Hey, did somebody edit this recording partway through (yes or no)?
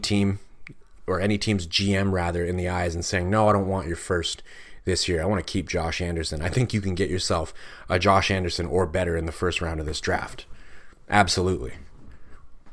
no